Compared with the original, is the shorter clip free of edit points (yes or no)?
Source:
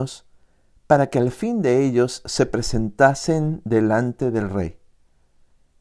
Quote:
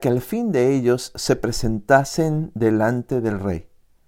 yes